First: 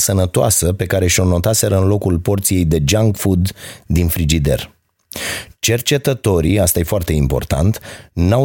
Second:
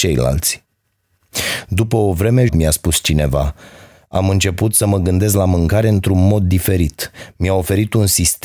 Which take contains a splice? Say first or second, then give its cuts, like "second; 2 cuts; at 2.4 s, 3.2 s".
second; 1 cut; at 2.5 s